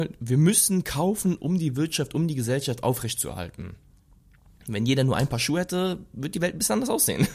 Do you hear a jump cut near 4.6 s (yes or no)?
no